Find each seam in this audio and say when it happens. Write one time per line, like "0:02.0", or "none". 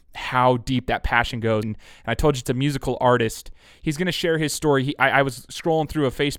0:01.6